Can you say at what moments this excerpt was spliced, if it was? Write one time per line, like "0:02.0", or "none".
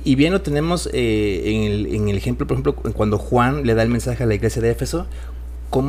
none